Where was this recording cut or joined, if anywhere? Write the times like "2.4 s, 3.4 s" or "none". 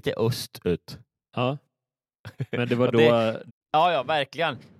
3.5 s